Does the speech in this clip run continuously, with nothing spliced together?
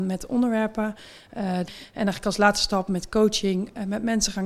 no; 1 cut; at 1.7 s

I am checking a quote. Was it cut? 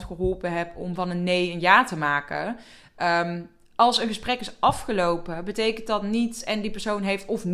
no; 0 cuts

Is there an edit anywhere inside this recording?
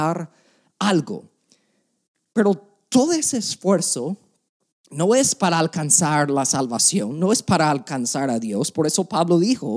no; 0 cuts

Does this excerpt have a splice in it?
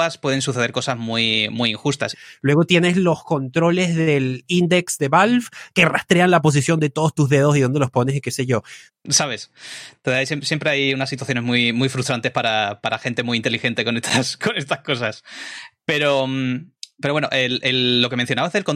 yes; 2 cuts; at 2.1 s, 8.9 s

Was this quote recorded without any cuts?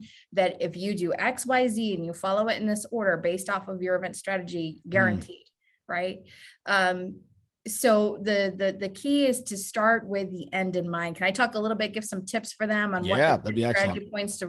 no; 1 cut; at 4.8 s

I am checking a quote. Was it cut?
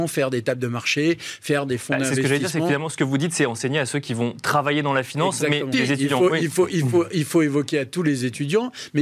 yes; 1 cut; at 5.7 s

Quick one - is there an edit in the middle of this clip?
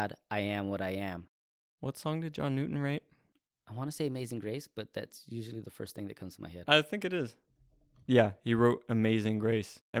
no; 0 cuts

